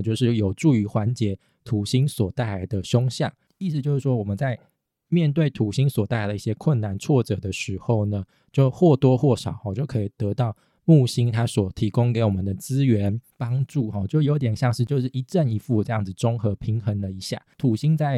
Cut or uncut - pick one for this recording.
uncut